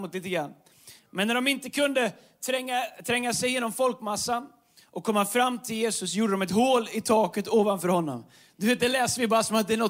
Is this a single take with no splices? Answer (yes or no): no